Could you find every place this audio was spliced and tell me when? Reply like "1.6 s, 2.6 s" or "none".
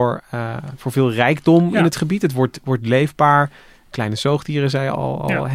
none

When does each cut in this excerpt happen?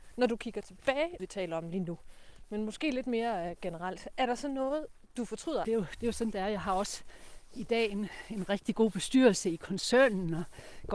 1.2 s, 5.6 s

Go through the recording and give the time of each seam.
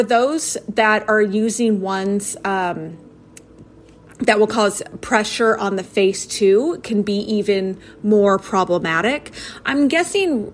none

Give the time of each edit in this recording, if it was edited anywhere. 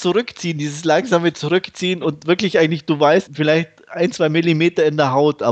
3.3 s

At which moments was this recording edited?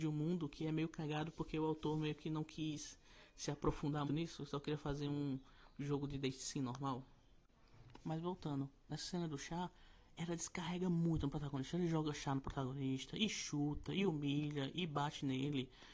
4.1 s

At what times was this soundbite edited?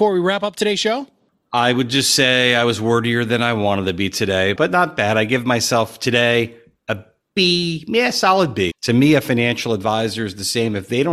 4.6 s, 8.7 s

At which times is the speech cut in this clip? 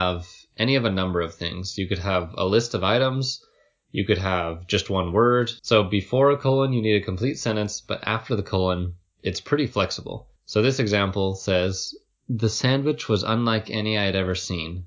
5.6 s, 10.4 s

